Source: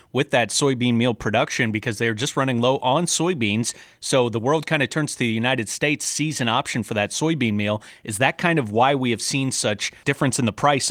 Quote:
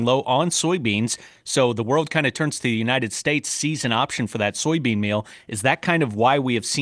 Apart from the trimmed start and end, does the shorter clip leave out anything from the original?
no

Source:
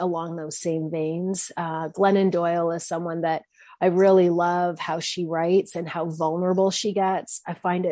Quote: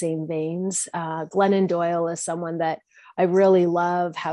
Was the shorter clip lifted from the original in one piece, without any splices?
yes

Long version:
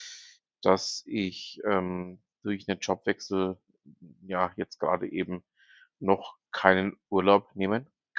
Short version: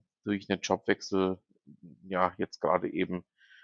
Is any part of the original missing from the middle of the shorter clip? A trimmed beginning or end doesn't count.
no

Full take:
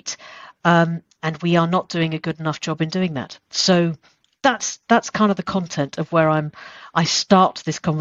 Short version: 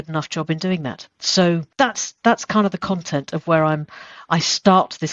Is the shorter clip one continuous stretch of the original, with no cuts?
no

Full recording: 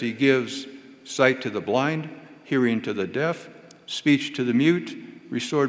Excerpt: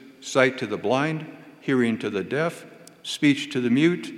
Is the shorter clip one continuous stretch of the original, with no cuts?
yes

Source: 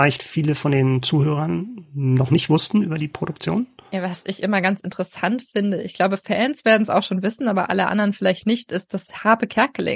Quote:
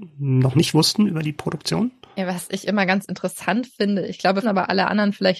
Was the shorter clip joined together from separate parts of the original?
yes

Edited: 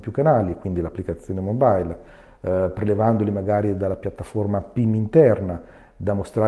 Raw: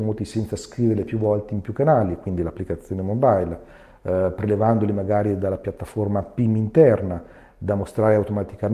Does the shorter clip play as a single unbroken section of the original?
yes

